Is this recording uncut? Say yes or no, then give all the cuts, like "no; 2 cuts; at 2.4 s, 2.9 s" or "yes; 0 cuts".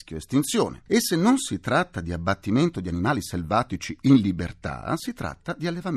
yes; 0 cuts